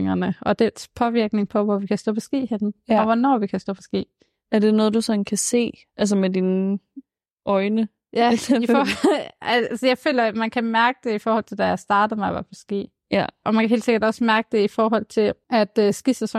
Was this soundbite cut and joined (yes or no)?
no